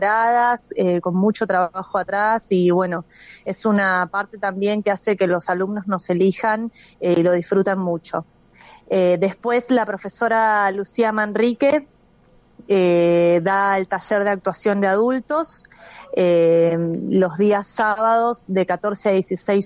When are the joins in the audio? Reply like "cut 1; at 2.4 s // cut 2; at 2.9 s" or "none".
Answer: none